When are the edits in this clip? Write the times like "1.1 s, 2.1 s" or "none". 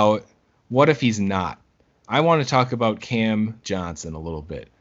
none